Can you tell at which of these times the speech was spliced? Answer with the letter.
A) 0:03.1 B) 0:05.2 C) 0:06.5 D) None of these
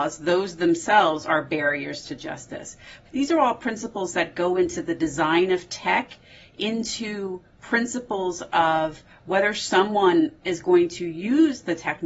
A